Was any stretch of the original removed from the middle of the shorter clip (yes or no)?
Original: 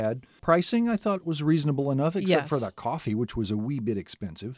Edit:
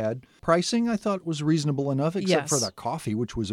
no